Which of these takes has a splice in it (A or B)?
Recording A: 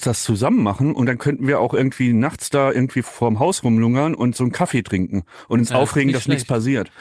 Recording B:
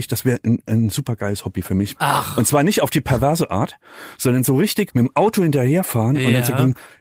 B